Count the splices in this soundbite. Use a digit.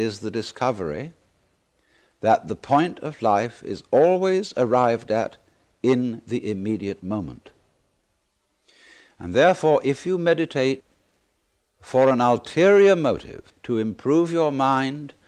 1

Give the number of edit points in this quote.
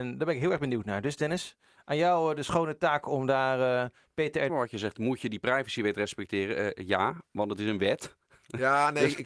1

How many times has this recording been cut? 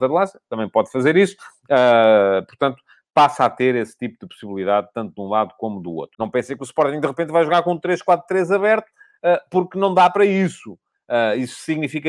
1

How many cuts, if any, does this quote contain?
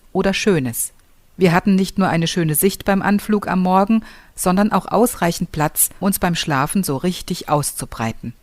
2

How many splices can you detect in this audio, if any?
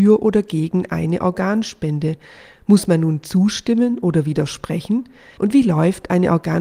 1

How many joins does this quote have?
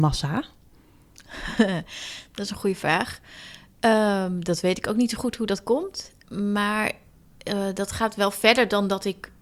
1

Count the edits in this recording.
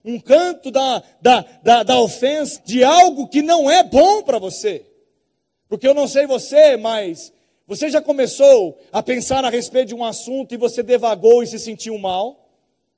1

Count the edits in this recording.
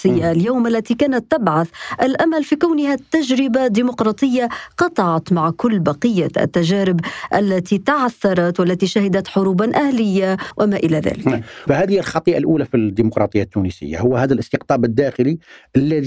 1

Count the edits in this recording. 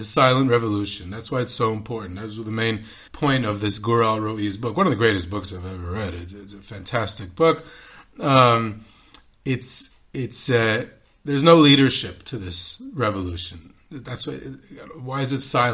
1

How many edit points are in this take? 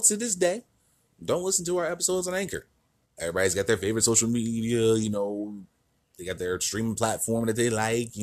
1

